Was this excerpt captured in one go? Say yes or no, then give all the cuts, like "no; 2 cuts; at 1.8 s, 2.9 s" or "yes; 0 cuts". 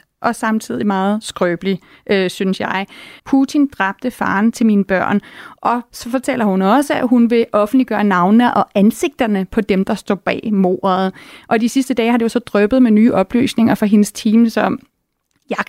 no; 1 cut; at 3.2 s